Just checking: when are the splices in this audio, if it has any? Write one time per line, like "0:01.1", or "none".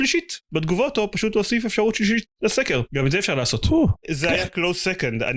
0:04.0